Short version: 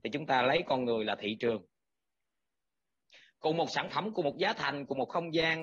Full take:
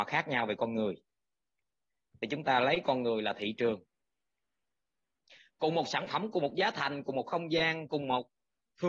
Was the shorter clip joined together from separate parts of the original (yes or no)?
no